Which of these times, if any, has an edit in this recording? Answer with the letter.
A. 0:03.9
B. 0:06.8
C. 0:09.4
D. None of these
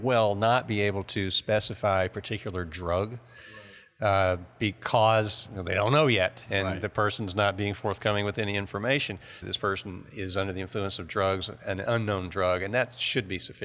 C